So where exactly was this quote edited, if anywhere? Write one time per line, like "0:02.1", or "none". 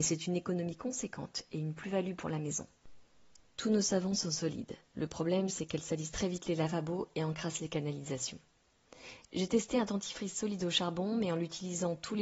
0:04.9